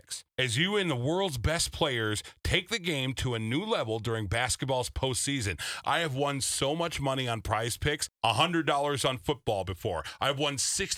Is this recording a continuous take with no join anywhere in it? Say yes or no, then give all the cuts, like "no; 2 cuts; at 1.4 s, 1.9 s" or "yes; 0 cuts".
yes; 0 cuts